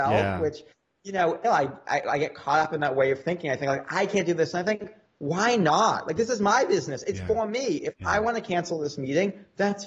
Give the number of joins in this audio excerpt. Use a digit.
1